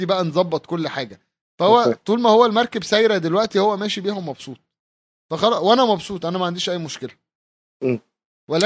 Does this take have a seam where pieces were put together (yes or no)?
no